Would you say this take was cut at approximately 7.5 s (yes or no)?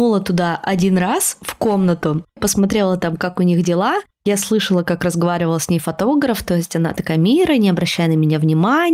no